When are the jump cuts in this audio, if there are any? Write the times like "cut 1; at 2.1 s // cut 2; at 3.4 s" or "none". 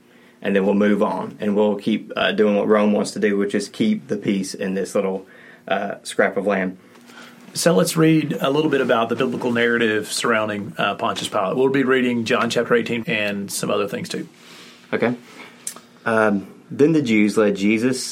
cut 1; at 13.0 s